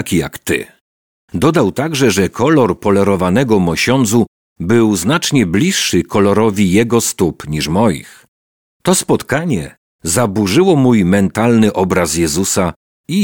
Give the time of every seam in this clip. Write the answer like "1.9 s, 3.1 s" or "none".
none